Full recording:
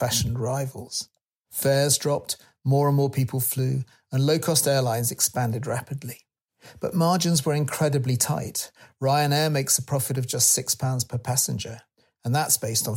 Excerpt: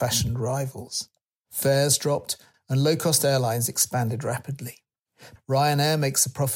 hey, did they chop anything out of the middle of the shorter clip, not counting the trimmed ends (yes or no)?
yes